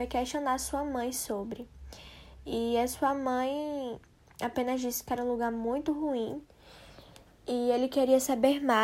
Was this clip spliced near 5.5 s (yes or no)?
no